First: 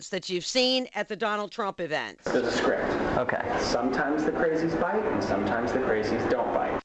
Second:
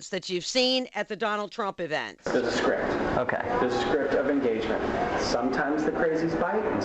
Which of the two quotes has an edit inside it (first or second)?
first